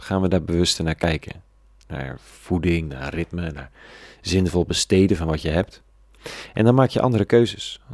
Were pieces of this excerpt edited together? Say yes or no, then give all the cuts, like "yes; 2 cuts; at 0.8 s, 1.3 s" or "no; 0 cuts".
no; 0 cuts